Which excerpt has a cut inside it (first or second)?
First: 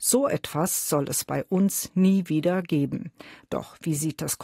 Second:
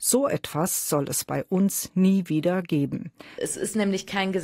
second